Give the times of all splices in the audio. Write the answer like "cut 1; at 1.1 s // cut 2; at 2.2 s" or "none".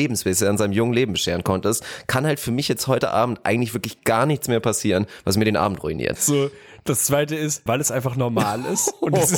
cut 1; at 6.2 s // cut 2; at 7.7 s